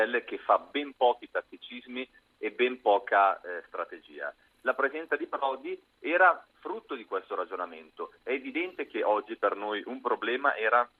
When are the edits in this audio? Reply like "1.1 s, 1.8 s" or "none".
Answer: 4.5 s